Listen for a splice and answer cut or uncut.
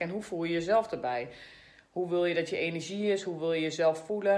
uncut